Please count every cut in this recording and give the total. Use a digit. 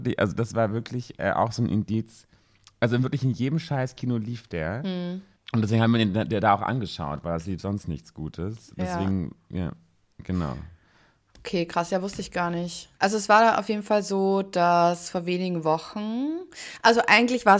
0